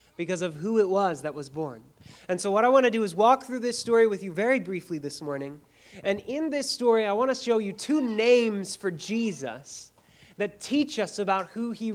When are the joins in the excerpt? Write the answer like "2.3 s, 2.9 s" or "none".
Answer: none

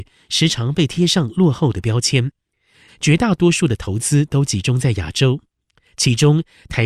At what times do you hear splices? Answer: 2.9 s

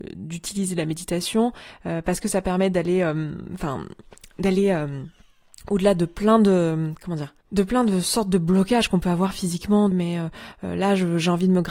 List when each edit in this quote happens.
7.4 s, 9.9 s

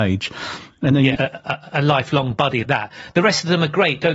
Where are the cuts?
1.2 s, 2.6 s

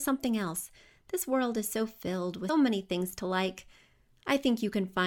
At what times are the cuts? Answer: 2.5 s

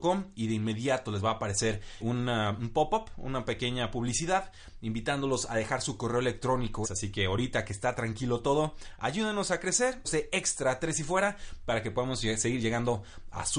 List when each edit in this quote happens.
2.0 s, 6.8 s, 10.0 s

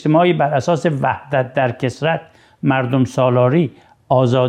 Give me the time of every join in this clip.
none

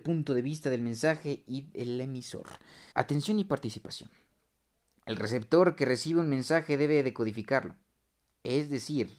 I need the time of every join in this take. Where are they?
2.9 s

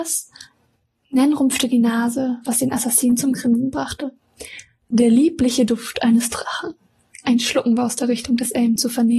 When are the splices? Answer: none

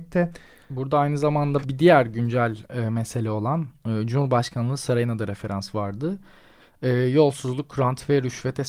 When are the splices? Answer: 1.6 s

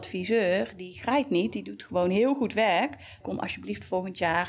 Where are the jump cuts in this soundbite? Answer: 3.2 s

